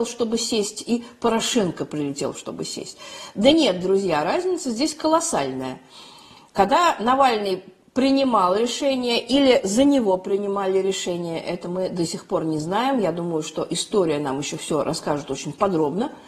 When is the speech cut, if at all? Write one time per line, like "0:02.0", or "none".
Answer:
none